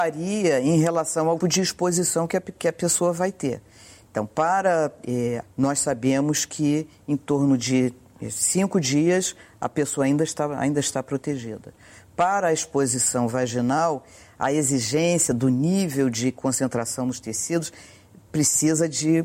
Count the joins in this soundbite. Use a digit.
2